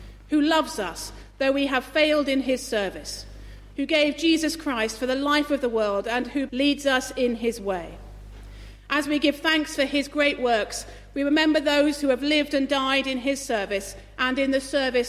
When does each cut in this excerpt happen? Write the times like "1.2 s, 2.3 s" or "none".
6.5 s